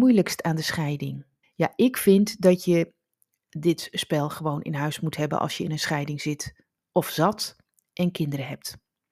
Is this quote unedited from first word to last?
no; 1 cut; at 1.4 s

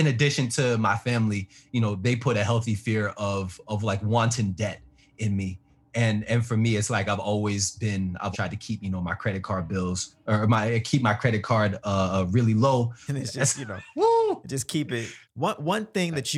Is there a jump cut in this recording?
yes; 3 cuts; at 8.3 s, 13.1 s, 15.2 s

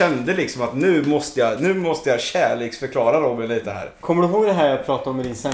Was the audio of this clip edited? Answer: no; 0 cuts

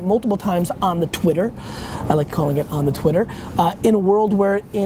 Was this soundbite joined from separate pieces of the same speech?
no; 0 cuts

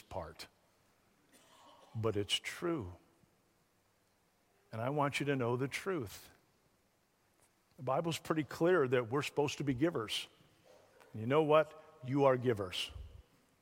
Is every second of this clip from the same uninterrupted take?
yes; 0 cuts

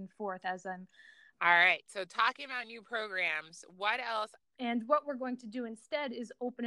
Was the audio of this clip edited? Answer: yes; 2 cuts; at 1.3 s, 4.4 s

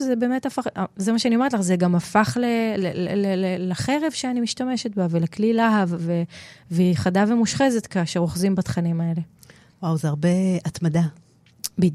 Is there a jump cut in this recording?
no; 0 cuts

